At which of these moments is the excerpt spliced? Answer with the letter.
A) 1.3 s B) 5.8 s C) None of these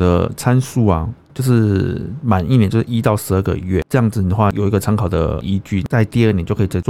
A